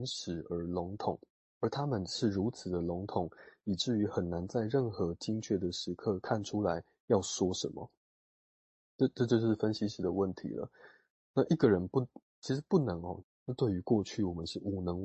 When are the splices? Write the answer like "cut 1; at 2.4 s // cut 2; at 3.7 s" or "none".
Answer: cut 1; at 13.2 s

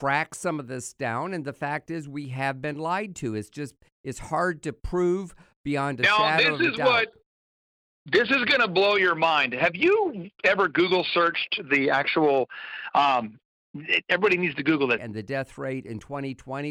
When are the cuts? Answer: cut 1; at 15.0 s

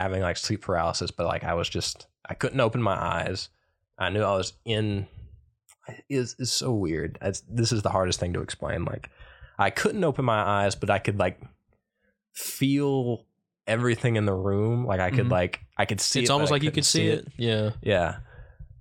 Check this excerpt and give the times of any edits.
none

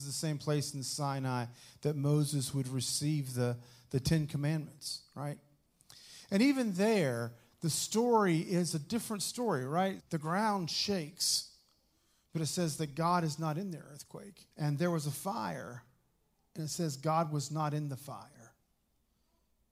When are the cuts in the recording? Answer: cut 1; at 10.0 s // cut 2; at 14.5 s

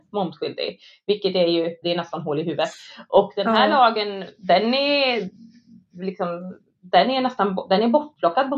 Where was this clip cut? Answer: cut 1; at 1.8 s

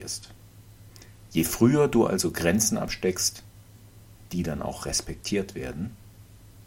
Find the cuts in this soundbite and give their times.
none

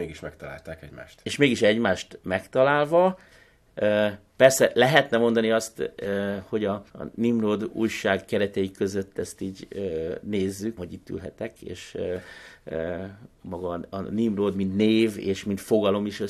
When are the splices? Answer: cut 1; at 6.9 s // cut 2; at 10.8 s

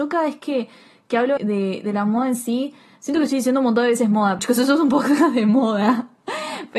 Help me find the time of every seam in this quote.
cut 1; at 1.4 s // cut 2; at 4.4 s

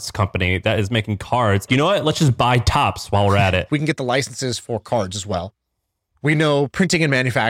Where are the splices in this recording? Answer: cut 1; at 1.7 s // cut 2; at 3.7 s

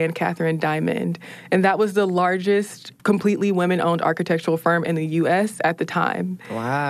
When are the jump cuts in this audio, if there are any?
cut 1; at 3.0 s

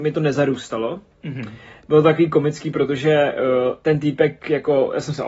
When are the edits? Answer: none

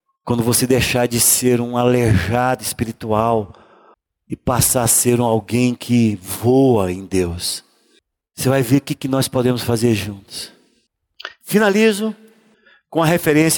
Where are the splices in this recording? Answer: none

